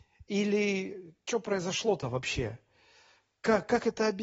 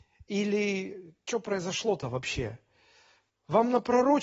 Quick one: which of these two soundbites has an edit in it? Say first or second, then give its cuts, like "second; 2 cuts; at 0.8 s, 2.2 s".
second; 1 cut; at 3.3 s